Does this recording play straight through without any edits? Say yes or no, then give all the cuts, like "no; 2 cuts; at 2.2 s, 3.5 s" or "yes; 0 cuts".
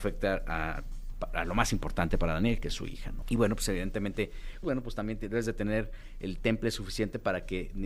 no; 2 cuts; at 3.2 s, 4.6 s